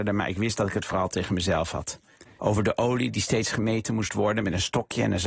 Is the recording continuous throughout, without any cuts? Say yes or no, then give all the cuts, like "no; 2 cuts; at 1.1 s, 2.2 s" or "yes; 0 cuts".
no; 1 cut; at 2.4 s